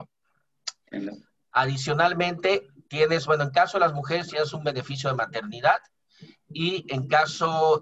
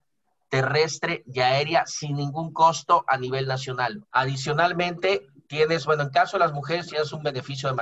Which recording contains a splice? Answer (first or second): second